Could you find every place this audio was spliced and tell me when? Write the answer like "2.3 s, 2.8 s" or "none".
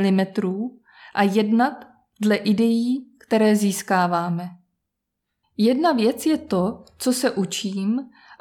5.4 s

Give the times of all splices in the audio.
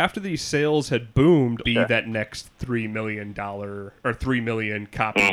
1.6 s

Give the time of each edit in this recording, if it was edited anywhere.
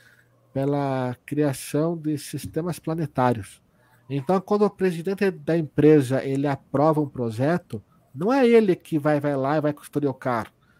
4.0 s

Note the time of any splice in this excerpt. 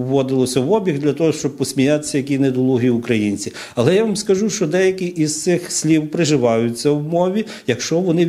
none

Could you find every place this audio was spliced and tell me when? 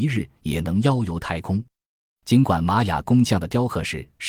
none

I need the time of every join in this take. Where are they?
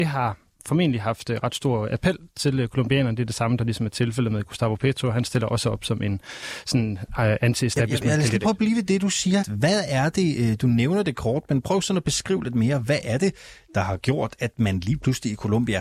9.4 s

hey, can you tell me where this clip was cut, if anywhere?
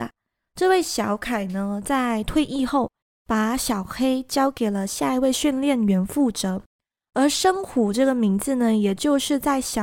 none

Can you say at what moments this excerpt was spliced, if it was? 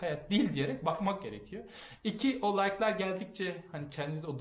2.0 s

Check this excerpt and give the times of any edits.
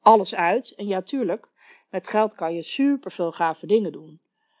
none

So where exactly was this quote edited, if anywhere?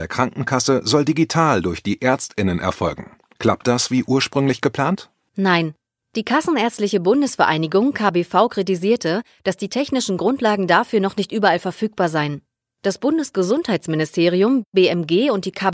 none

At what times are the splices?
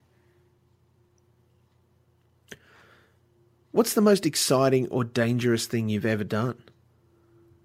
none

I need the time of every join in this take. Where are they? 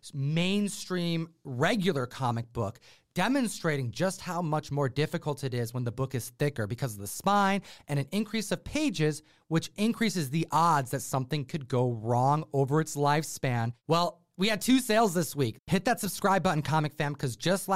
7.8 s, 13.8 s, 15.6 s

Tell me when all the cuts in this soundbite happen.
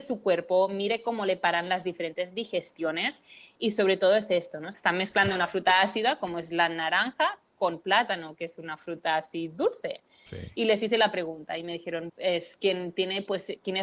4.7 s, 12.1 s

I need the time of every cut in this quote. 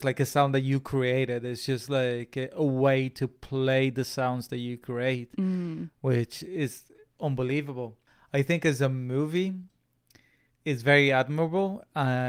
none

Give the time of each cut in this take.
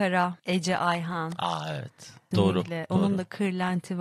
2.3 s

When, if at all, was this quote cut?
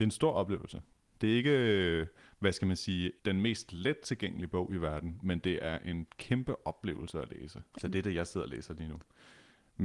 3.2 s, 7.7 s

